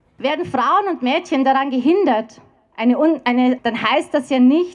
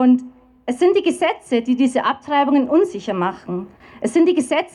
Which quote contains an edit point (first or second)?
first